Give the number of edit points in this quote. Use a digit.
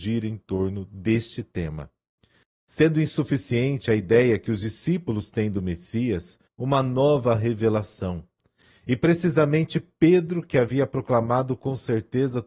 1